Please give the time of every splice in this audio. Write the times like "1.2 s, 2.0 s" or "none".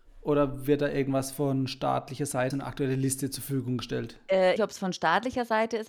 2.5 s, 4.6 s